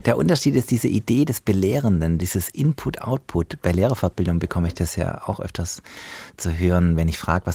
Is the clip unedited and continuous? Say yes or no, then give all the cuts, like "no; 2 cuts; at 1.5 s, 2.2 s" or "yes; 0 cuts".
yes; 0 cuts